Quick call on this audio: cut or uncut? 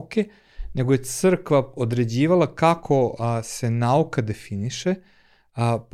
uncut